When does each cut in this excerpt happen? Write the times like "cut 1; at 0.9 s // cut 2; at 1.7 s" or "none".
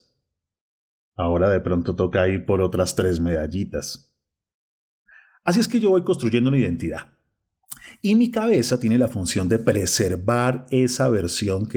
none